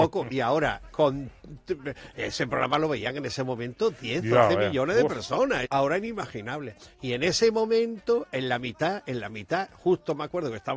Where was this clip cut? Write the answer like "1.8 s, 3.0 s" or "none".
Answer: 5.7 s